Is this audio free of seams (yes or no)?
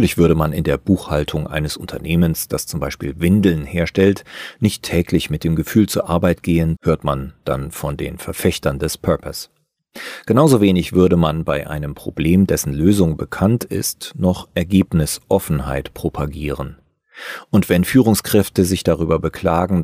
no